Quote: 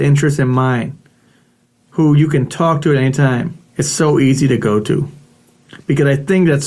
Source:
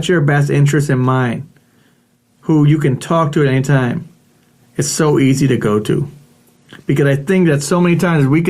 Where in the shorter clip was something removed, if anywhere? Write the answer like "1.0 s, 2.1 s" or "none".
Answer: 3.7 s